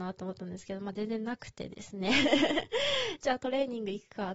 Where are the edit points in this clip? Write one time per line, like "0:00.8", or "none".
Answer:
none